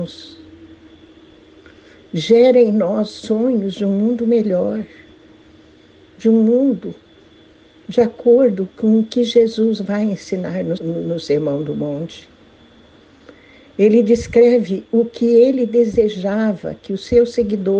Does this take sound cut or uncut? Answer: cut